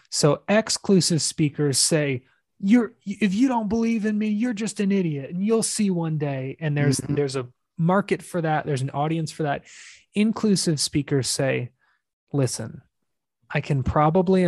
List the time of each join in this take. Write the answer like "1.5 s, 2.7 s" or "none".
none

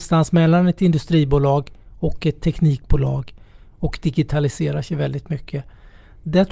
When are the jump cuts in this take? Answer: none

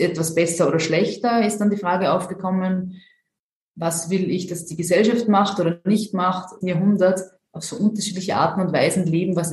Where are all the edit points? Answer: 3.7 s, 6.6 s

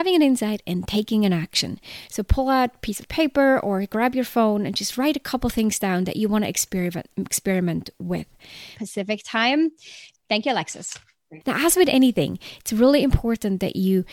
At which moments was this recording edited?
8.7 s, 10.1 s, 11.4 s

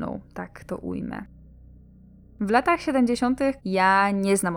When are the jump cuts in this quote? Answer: 3.6 s

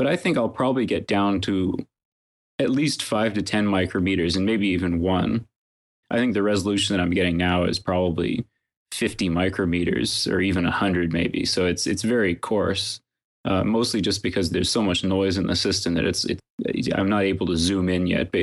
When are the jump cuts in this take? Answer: 6.0 s

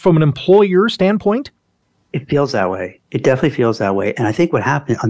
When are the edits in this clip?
3.0 s

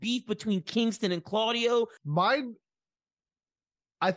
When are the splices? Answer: 2.0 s

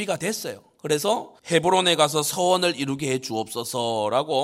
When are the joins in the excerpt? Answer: 1.4 s

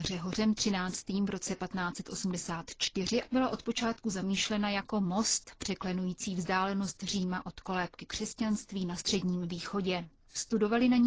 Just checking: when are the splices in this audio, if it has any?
3.2 s

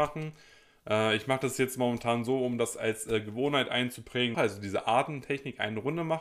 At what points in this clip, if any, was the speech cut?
4.3 s

